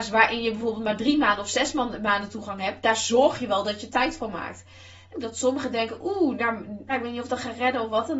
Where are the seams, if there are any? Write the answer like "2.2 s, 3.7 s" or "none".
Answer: 5.1 s, 6.9 s